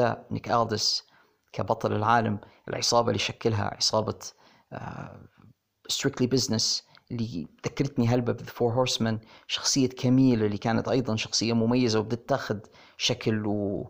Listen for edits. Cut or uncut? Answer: uncut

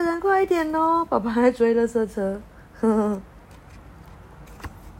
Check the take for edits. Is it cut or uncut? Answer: uncut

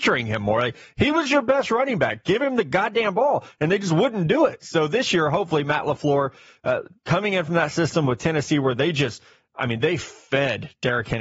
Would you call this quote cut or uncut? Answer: uncut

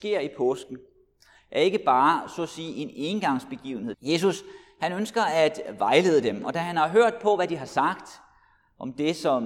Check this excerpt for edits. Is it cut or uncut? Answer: cut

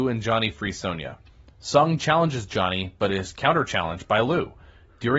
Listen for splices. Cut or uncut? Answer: uncut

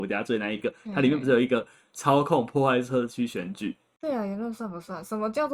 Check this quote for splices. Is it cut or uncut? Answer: cut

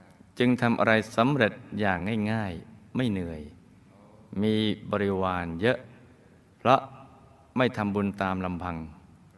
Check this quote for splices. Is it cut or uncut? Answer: uncut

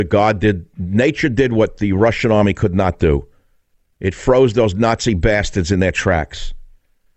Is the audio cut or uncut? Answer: uncut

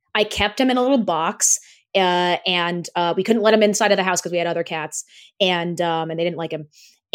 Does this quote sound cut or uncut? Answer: uncut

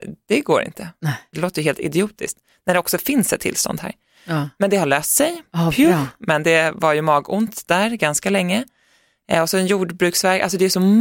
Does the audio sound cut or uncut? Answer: cut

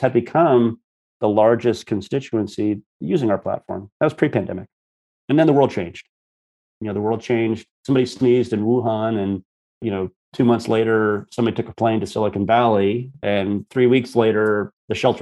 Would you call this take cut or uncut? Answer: uncut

